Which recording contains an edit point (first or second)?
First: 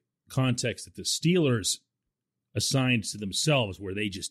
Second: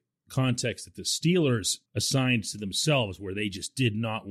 second